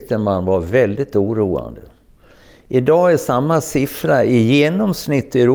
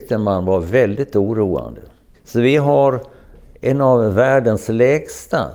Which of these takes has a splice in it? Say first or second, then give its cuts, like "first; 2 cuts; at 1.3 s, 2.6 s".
second; 1 cut; at 2.1 s